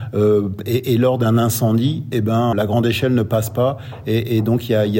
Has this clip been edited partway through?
yes; 1 cut; at 2.5 s

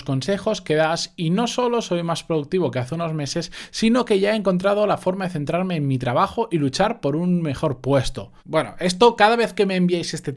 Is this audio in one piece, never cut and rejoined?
no; 1 cut; at 8.4 s

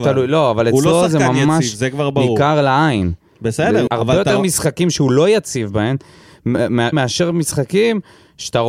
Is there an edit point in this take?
yes; 2 cuts; at 3.9 s, 6.9 s

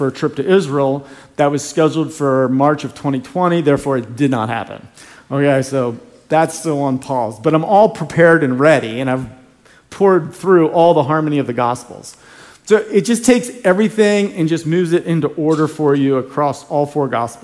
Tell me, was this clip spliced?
no; 0 cuts

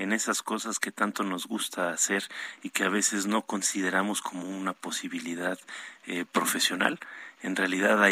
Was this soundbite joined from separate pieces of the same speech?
no; 0 cuts

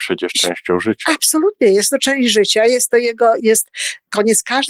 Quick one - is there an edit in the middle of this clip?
yes; 1 cut; at 3.4 s

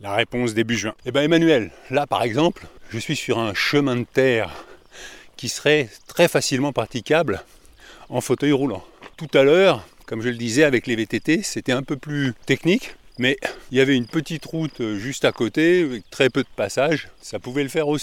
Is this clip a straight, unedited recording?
no; 1 cut; at 1.0 s

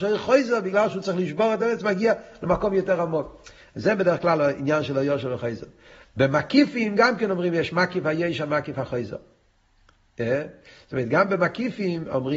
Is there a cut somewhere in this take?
no; 0 cuts

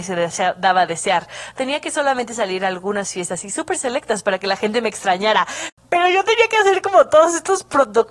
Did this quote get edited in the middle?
yes; 1 cut; at 5.7 s

